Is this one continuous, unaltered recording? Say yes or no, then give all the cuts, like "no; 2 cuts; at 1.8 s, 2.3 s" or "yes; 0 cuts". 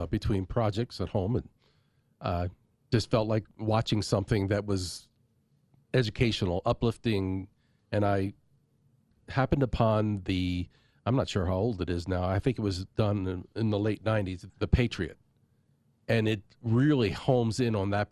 no; 1 cut; at 14.5 s